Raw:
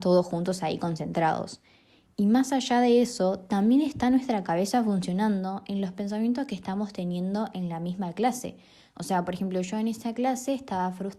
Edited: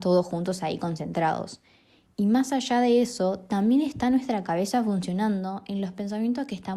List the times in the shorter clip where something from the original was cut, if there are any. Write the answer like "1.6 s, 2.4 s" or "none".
none

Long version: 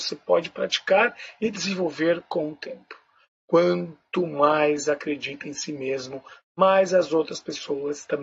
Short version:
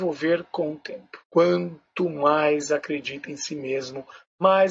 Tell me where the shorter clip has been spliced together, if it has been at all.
1.2 s

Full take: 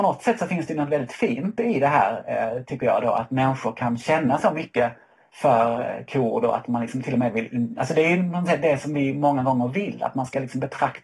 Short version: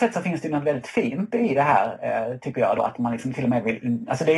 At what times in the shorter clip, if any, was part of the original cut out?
2.8 s

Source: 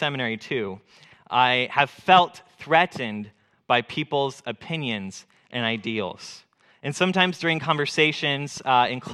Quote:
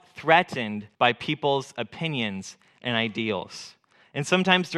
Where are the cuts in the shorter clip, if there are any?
0.9 s

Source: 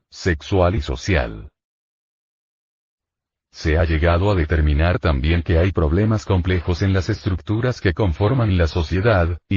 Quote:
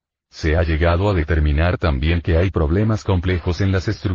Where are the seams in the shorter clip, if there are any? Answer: none

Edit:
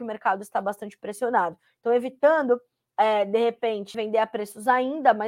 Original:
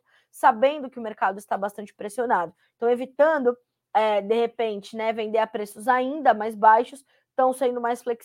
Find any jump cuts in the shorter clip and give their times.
3.9 s

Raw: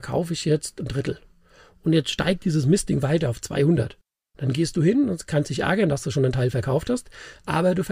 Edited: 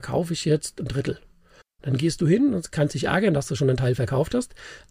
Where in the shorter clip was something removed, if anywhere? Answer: 1.6 s

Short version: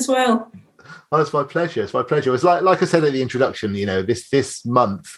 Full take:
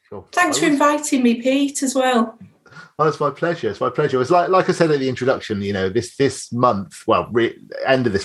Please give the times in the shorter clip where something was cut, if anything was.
none

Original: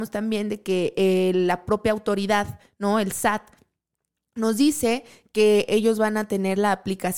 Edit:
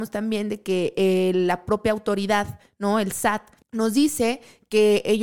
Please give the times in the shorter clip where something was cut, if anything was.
3.6 s

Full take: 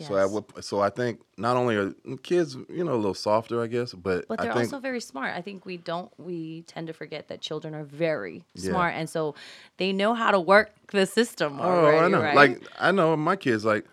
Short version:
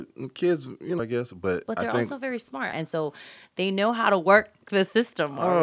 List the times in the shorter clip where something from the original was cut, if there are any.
1.0 s, 2.7 s

